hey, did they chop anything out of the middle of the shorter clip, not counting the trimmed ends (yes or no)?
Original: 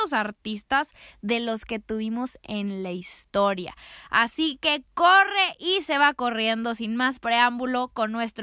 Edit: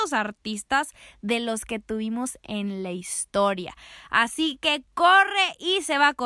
no